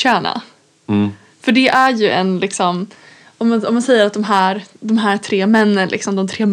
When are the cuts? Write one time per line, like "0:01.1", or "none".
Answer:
none